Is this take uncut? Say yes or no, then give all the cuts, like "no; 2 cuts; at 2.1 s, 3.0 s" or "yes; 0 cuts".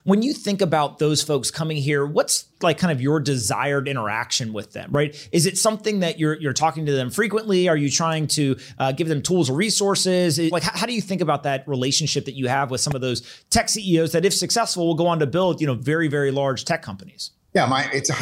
no; 1 cut; at 10.5 s